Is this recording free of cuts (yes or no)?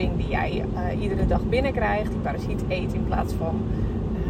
yes